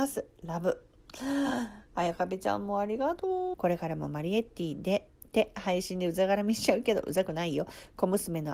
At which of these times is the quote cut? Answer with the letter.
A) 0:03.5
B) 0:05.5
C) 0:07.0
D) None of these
A